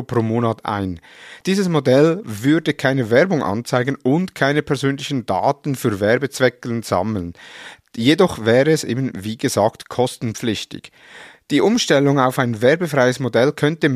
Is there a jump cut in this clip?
no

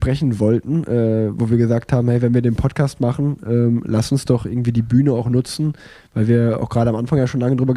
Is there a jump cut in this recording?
no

